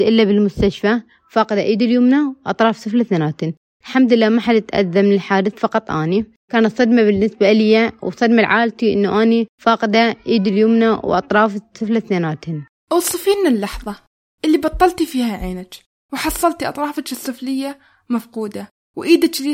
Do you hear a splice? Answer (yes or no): no